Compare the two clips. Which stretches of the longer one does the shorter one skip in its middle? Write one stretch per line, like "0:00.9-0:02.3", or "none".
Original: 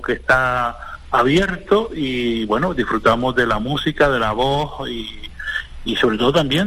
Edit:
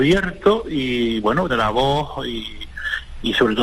0:02.7-0:04.1